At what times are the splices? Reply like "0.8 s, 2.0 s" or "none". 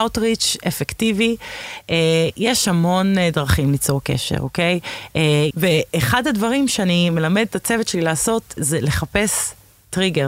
5.5 s, 8.6 s